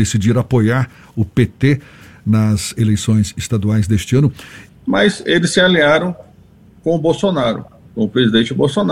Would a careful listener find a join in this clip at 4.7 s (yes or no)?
yes